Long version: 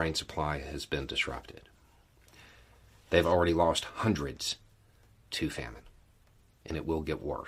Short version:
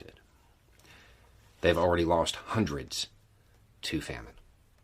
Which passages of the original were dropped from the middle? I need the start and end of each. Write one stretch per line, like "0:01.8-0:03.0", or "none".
none

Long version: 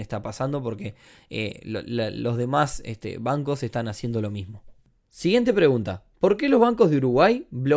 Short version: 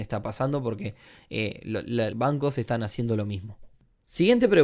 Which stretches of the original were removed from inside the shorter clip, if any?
0:02.1-0:03.2

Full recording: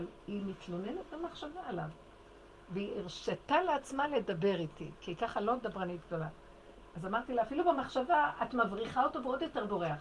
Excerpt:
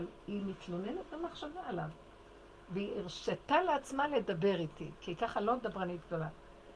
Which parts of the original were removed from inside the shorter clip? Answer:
none

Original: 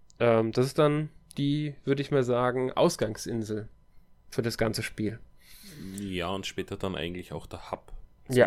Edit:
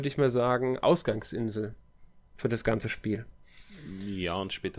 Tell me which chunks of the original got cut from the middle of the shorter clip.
none

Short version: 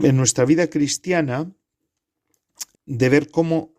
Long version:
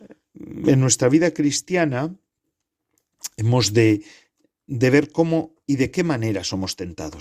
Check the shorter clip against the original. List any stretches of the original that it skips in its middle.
0:03.3-0:04.5

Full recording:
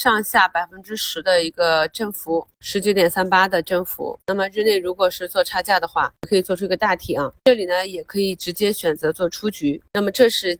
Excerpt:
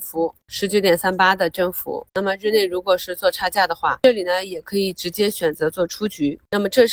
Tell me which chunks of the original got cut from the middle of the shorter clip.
0:06.1-0:07.4

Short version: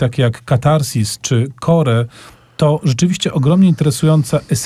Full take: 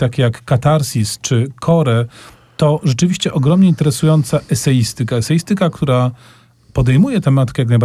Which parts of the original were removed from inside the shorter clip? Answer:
none

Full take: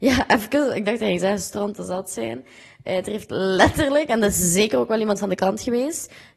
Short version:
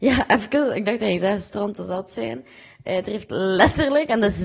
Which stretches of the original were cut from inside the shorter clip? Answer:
none

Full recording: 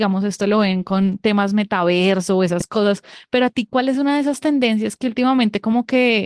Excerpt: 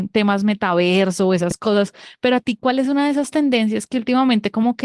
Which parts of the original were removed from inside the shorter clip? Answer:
none

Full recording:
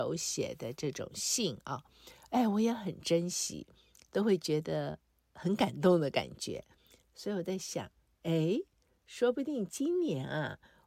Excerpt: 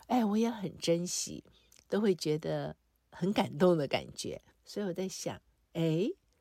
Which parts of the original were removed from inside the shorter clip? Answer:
0:06.7-0:07.0

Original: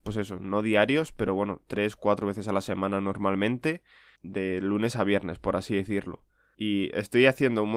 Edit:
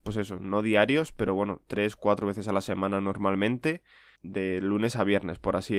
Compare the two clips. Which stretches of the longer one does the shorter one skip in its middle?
none

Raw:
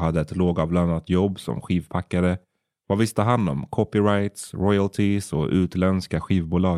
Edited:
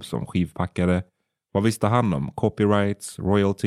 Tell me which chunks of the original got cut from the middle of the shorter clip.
none

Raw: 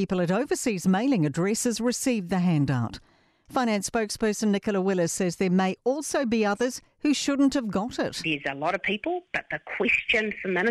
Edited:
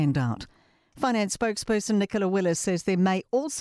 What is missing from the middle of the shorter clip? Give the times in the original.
none

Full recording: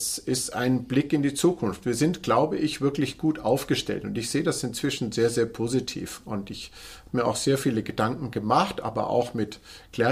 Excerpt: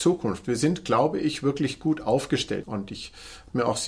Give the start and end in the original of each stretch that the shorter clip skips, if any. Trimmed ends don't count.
0:04.0-0:06.2

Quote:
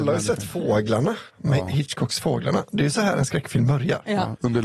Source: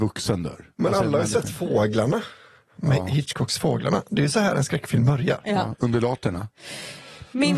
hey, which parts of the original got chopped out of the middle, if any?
0:02.3-0:02.7

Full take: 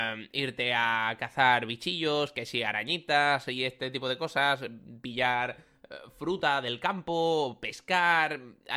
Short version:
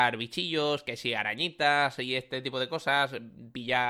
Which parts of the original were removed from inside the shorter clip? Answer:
none

